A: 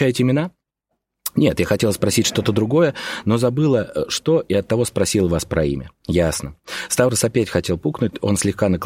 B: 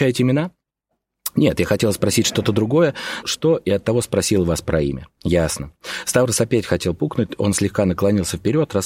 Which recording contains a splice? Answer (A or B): B